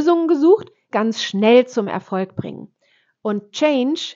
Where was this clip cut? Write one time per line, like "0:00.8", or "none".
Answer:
0:00.9